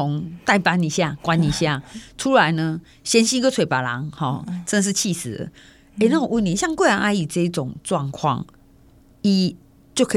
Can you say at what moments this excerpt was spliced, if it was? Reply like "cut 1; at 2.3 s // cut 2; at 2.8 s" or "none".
none